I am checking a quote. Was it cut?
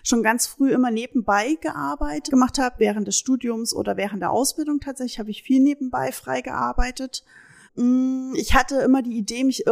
yes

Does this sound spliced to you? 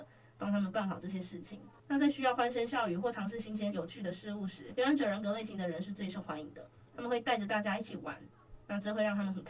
yes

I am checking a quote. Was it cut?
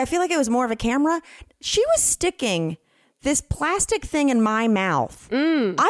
no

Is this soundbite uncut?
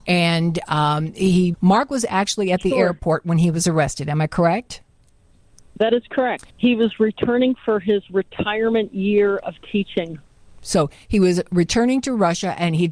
no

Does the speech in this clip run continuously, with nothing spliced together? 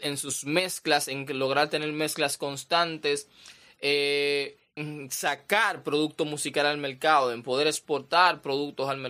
no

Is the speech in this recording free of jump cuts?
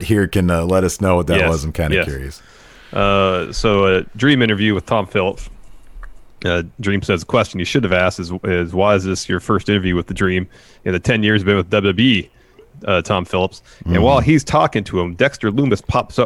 yes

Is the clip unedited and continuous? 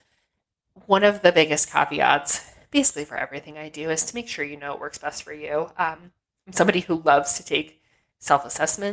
yes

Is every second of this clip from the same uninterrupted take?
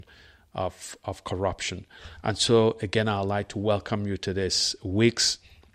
yes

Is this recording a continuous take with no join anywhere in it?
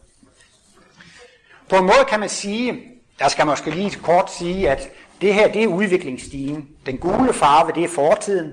no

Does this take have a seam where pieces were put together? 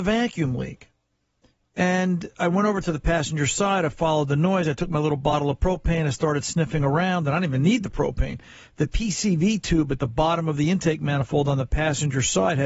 no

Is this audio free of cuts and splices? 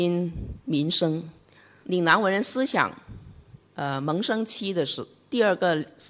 no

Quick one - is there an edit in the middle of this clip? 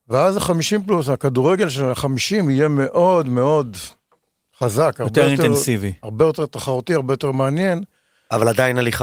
no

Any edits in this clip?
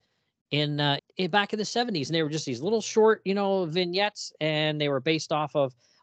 yes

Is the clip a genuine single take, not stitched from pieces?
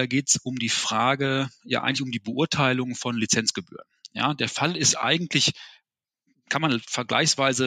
yes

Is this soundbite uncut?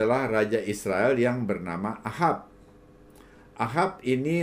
yes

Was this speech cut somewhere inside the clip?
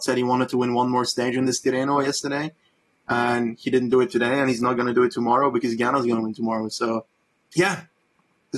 yes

